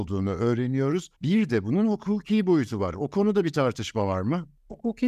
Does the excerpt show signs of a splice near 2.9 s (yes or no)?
no